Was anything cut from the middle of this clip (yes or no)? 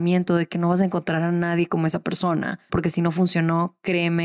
yes